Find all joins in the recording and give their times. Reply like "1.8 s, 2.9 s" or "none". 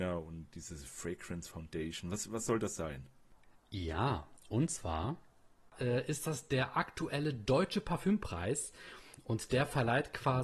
none